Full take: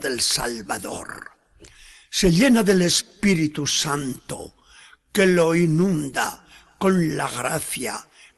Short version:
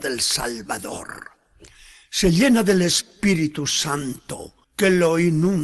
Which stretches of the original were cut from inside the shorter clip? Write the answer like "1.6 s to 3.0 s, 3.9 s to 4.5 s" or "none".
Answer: 4.6 s to 5.0 s

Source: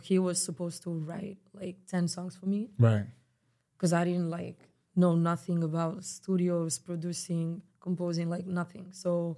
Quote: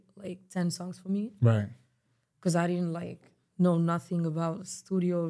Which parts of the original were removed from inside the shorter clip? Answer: none

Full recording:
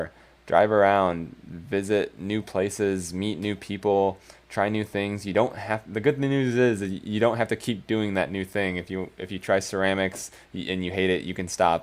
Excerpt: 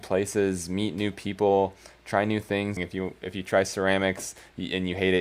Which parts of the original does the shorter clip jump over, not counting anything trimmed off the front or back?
5.2 s to 8.7 s

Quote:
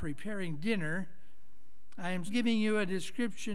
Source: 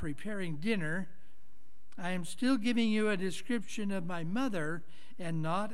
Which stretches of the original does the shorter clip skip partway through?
2.3 s to 2.6 s

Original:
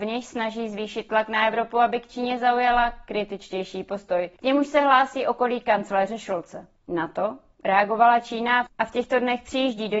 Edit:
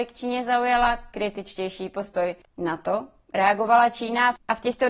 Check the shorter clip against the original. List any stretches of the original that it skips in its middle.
4.4 s to 6.8 s

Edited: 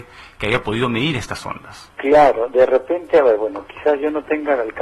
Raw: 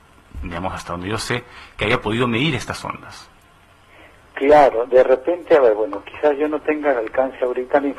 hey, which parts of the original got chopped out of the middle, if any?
3.3 s to 4.3 s

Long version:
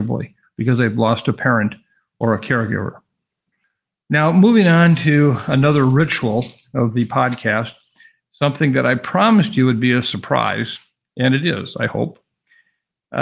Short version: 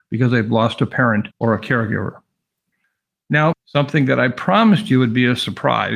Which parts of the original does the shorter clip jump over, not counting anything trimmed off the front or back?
1.8 s to 2.1 s, 4.3 s to 8.2 s

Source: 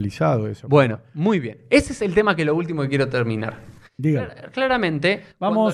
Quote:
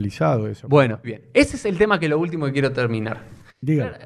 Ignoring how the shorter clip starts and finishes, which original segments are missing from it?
1.0 s to 1.4 s

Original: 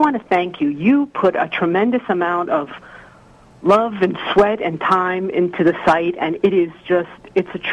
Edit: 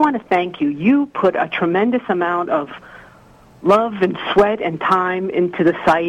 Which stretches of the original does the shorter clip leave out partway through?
none

